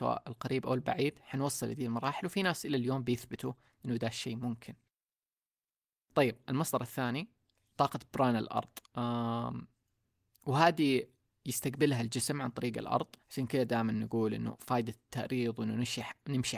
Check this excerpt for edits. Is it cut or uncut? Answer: cut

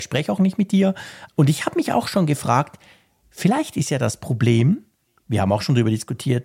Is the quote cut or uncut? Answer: cut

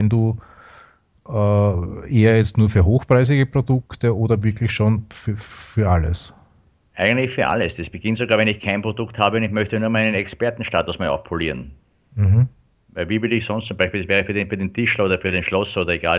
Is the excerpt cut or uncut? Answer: uncut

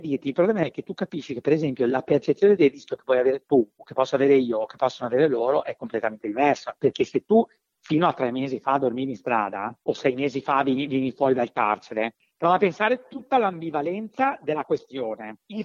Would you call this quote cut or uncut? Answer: uncut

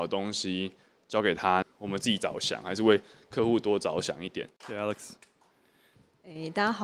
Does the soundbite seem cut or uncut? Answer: cut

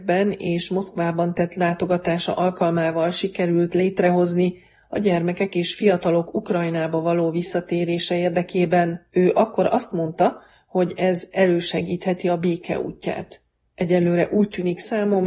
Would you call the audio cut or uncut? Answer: cut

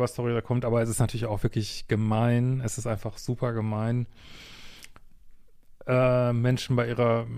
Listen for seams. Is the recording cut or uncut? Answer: uncut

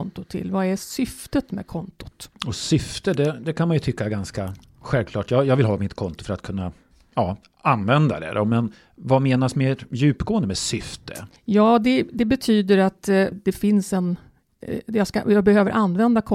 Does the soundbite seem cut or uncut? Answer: cut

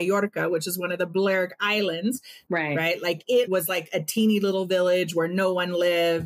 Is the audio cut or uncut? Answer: cut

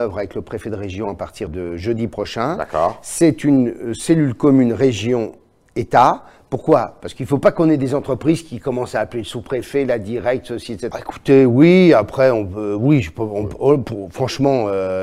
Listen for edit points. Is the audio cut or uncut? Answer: cut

